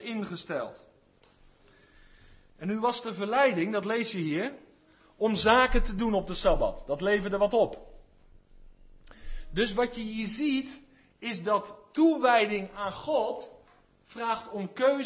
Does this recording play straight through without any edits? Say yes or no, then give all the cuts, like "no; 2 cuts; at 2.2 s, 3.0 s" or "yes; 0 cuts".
yes; 0 cuts